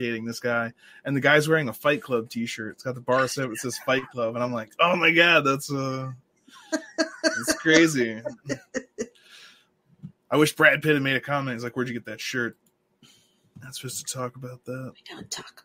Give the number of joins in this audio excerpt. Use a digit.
0